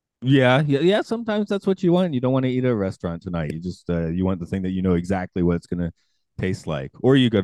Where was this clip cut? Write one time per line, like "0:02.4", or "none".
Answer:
none